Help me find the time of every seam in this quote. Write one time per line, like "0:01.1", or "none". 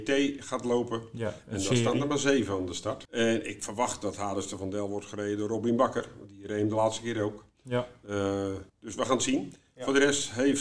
0:03.0
0:08.7